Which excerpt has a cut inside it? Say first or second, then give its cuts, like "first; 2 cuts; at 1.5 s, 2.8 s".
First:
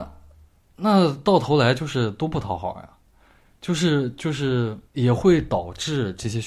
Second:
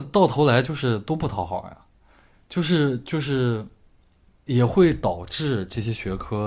first; 1 cut; at 4.9 s